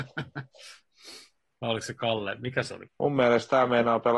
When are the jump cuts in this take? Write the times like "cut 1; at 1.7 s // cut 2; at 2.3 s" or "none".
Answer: cut 1; at 2.9 s